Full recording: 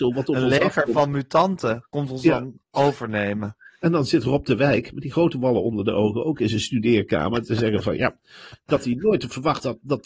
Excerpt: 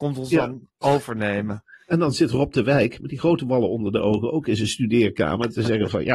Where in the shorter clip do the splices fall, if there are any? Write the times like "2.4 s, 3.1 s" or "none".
none